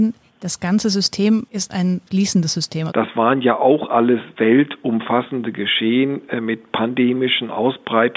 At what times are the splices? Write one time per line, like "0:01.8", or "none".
0:02.9